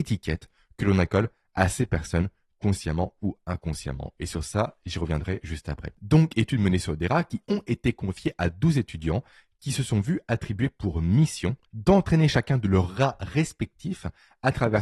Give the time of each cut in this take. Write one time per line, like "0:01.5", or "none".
0:05.9
0:11.7